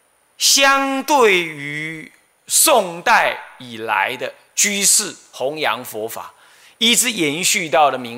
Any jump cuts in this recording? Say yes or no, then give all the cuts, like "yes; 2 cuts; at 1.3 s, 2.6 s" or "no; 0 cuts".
no; 0 cuts